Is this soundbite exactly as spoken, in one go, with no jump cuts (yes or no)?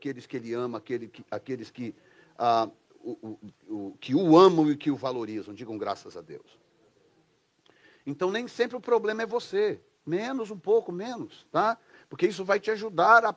yes